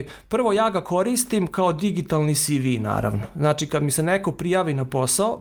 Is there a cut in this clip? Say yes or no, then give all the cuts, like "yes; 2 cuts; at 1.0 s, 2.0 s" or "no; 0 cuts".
no; 0 cuts